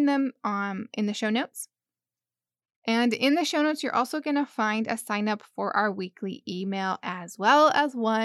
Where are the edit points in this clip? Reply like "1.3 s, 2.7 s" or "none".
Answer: none